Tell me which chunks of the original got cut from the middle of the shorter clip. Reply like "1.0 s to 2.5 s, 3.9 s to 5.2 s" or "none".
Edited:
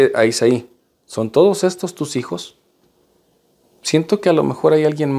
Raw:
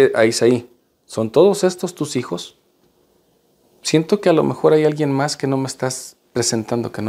none